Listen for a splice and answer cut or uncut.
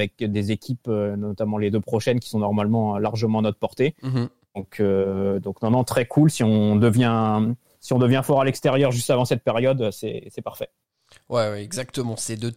uncut